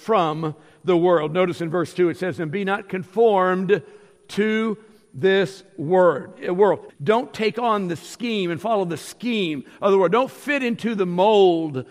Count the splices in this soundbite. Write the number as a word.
one